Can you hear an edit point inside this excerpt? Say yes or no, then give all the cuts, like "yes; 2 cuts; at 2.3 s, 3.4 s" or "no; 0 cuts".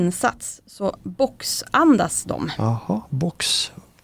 no; 0 cuts